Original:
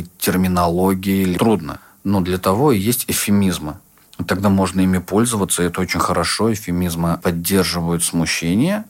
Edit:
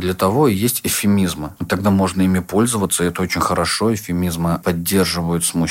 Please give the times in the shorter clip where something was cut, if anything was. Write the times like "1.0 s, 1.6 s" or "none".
1.6 s

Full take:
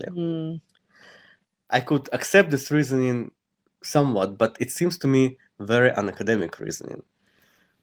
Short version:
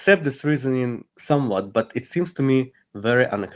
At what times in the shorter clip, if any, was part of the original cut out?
1.1 s

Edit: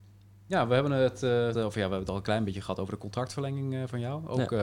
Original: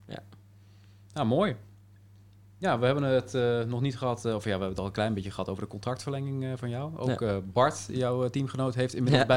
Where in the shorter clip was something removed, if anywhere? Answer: 1.5 s

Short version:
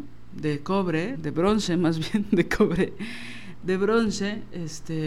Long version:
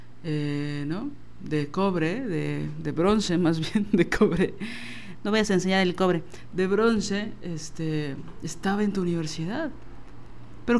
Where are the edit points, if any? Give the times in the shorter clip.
1.1 s, 3.6 s

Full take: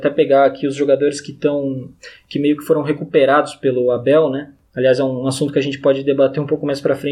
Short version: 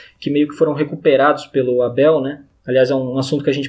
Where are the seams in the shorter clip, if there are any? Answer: none

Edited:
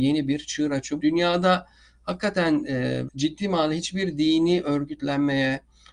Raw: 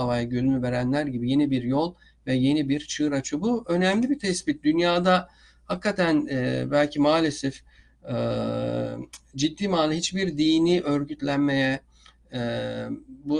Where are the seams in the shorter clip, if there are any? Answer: 1.0 s, 3.1 s

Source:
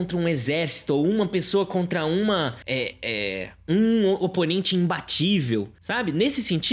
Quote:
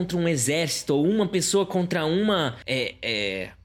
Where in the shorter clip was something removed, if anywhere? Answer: none

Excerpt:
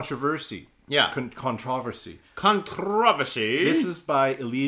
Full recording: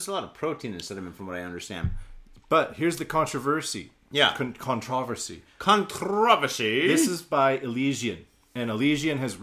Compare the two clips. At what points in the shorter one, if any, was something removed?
none

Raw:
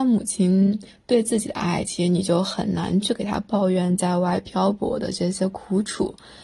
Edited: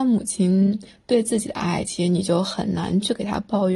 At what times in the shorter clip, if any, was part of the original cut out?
none

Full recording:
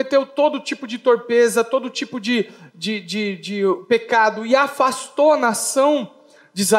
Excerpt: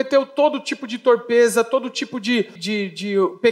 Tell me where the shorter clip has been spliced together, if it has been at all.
2.6 s

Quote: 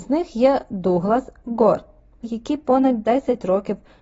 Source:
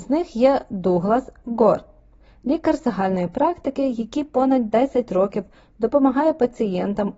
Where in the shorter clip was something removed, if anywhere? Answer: 2.2 s

